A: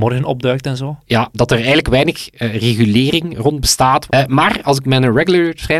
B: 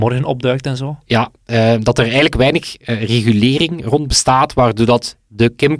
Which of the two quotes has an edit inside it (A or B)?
A